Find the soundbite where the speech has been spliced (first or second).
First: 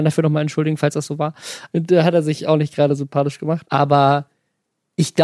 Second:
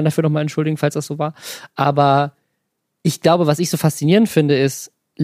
first